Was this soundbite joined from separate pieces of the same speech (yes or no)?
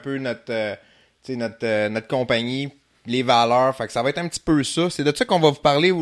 no